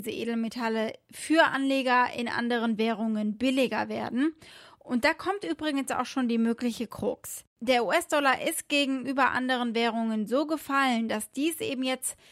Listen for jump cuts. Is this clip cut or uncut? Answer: cut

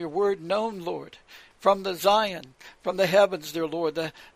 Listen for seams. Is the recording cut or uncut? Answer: uncut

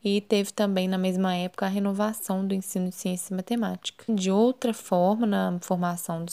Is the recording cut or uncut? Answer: cut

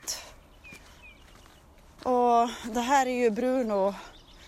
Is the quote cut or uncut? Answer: uncut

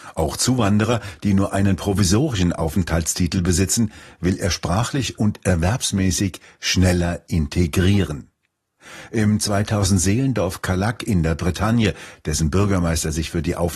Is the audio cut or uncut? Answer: uncut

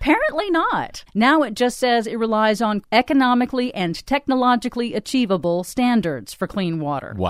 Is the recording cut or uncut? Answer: cut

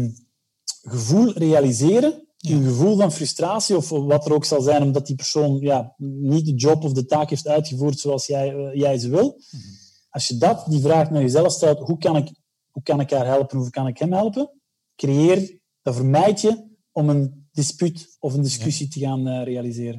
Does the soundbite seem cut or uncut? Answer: uncut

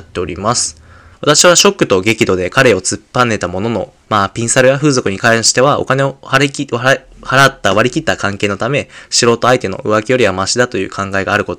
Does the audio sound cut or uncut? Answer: cut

